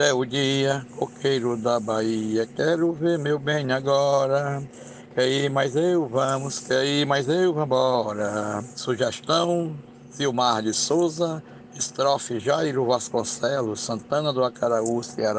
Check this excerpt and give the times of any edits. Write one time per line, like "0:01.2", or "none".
0:08.7